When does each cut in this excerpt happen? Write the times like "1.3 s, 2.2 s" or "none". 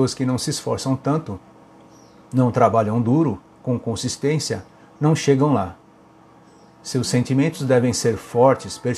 none